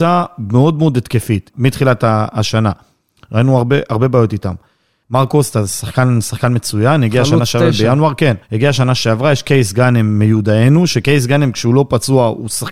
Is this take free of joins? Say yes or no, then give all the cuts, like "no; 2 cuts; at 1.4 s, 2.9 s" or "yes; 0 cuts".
no; 3 cuts; at 1.5 s, 5.0 s, 8.4 s